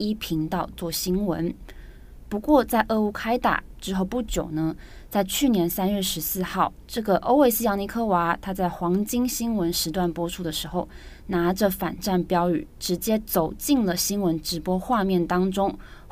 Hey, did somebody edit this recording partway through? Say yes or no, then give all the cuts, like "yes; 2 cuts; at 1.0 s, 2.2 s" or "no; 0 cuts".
no; 0 cuts